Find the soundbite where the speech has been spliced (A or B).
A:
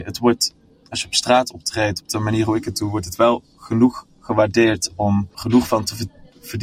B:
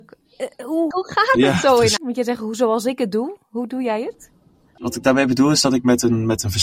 B